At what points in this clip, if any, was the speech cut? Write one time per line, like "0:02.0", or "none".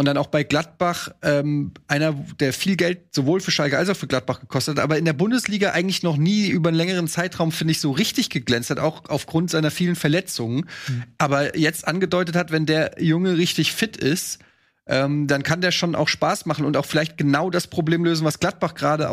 none